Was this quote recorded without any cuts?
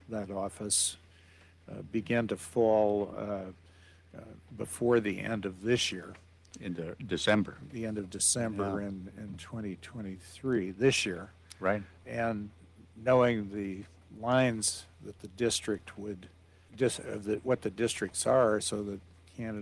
yes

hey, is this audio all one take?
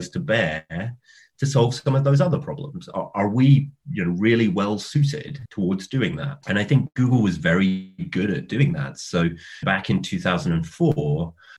yes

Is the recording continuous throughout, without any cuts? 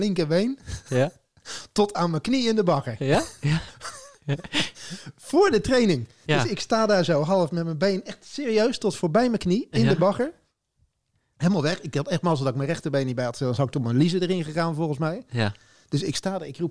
yes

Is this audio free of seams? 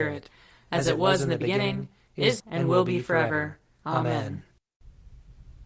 no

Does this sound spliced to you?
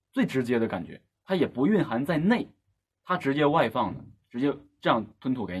yes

